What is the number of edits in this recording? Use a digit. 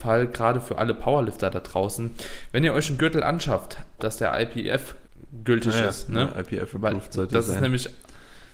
1